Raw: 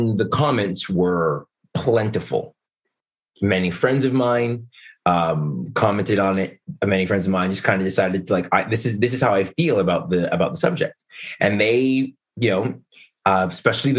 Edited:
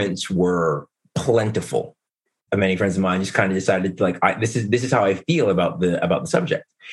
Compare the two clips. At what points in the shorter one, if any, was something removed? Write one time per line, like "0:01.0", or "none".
0:02.5